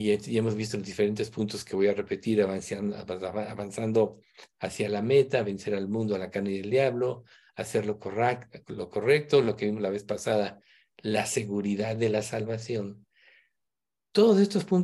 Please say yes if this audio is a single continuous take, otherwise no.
yes